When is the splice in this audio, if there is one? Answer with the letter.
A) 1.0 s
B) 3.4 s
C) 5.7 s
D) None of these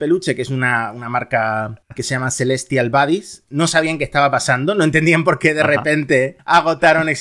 D